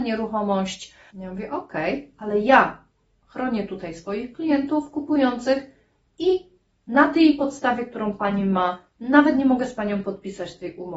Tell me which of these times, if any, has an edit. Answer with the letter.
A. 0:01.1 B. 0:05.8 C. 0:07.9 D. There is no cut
A